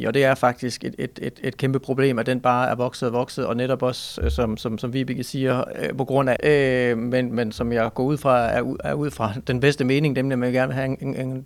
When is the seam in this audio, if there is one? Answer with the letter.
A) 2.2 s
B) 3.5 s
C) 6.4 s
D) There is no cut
C